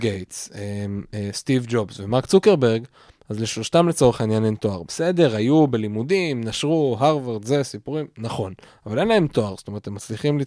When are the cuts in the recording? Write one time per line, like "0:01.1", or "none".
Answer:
none